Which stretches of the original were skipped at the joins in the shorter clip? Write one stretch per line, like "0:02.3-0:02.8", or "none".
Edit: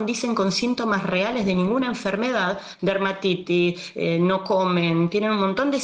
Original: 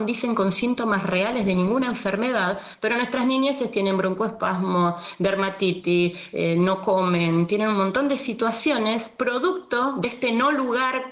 0:02.8-0:05.2